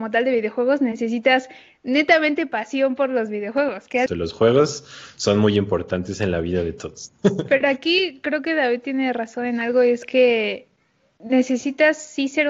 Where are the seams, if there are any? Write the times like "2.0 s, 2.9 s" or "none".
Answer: 4.1 s